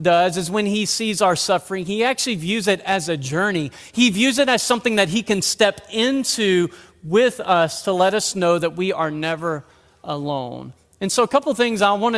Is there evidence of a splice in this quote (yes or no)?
no